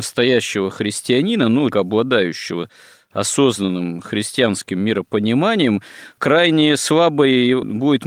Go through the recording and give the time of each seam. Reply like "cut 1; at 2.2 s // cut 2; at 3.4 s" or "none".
cut 1; at 1.7 s